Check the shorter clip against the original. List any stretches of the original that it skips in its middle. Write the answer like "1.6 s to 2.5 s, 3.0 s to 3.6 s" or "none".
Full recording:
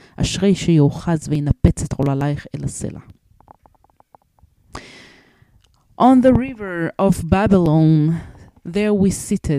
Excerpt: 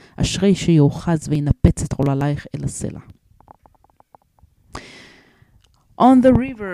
none